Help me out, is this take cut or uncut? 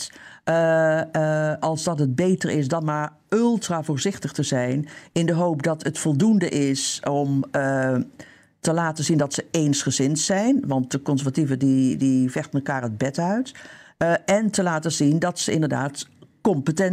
uncut